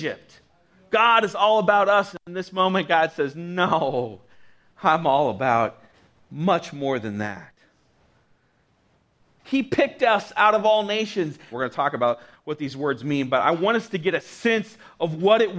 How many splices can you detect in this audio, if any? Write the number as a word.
two